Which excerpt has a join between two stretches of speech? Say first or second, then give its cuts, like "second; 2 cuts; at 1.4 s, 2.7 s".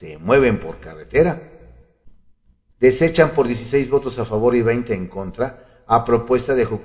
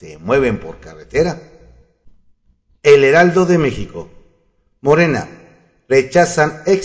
first; 1 cut; at 2.7 s